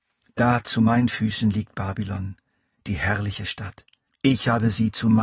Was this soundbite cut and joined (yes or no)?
yes